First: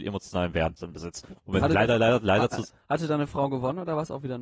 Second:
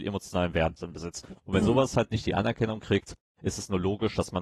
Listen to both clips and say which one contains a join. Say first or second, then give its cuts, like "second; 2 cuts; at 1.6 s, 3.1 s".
first; 1 cut; at 1.6 s